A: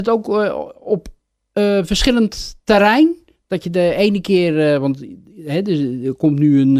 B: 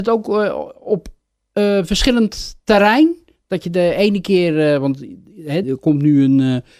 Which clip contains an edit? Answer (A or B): B